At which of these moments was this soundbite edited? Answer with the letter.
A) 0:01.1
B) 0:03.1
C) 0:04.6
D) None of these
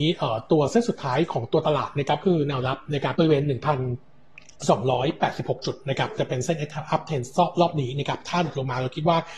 B